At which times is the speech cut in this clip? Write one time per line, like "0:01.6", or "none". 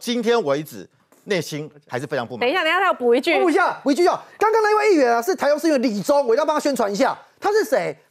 none